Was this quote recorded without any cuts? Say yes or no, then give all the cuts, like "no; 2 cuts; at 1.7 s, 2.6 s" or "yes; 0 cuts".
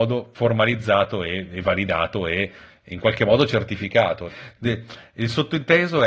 no; 1 cut; at 4.3 s